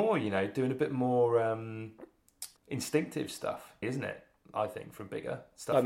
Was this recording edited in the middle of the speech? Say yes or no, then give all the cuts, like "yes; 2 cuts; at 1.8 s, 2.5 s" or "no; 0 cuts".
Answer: yes; 2 cuts; at 2.6 s, 3.8 s